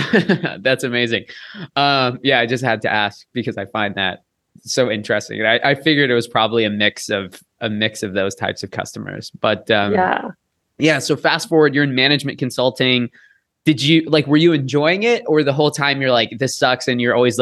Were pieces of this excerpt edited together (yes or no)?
no